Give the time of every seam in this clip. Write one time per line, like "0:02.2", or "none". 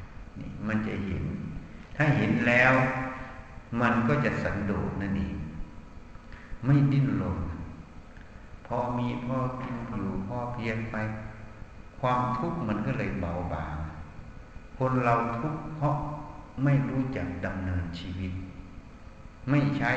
0:09.9